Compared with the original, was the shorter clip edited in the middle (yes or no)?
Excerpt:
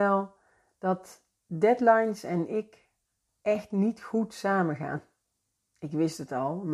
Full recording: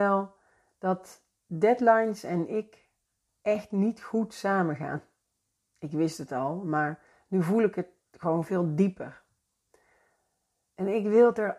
no